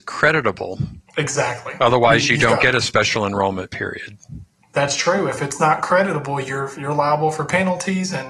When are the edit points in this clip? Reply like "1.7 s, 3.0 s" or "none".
1.1 s